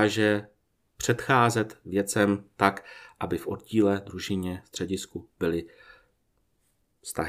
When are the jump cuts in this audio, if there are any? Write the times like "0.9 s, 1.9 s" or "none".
none